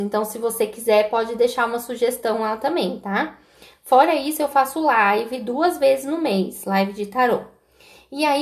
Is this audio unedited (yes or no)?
yes